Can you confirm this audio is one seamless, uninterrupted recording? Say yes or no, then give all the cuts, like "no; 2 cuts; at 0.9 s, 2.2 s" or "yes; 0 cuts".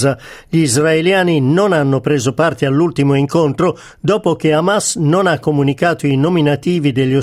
yes; 0 cuts